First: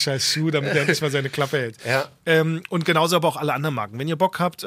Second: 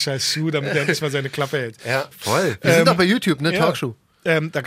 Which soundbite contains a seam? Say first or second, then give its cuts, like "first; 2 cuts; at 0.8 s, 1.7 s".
second; 1 cut; at 2.1 s